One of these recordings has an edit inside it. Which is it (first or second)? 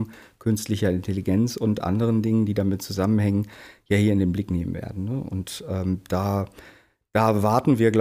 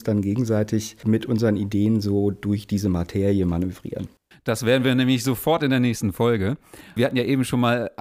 second